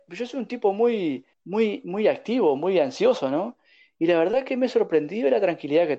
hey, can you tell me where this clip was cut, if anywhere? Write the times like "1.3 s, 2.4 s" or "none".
1.3 s